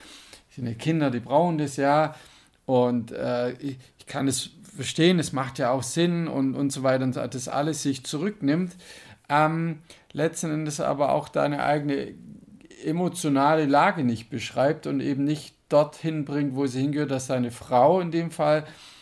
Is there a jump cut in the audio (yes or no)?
no